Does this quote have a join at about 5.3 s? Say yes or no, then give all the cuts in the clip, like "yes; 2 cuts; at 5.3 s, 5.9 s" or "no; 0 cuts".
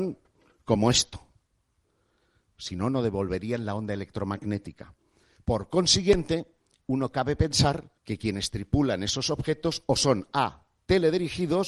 yes; 2 cuts; at 5.3 s, 8.0 s